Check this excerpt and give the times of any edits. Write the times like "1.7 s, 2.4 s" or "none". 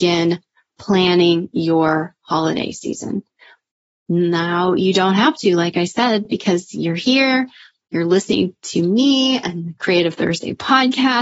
none